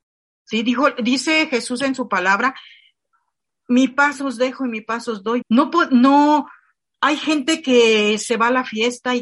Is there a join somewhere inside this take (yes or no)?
yes